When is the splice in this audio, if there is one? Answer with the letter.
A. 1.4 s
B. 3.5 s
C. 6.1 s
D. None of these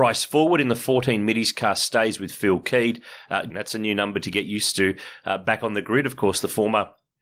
B